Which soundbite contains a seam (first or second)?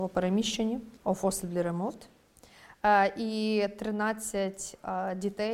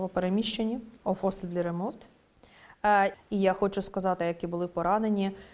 second